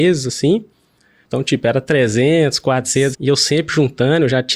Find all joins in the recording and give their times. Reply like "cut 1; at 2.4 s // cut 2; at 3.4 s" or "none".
cut 1; at 1.2 s // cut 2; at 3.1 s